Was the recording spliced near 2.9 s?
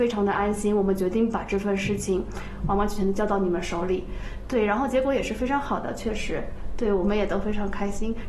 no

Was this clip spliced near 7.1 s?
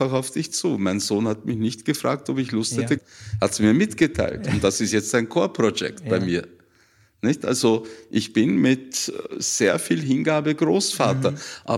no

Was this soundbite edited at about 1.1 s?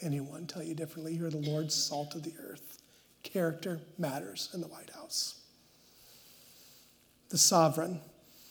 no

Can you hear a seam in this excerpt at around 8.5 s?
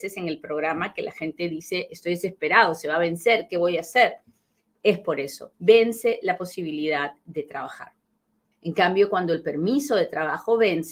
yes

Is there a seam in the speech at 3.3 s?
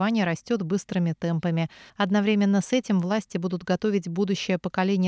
no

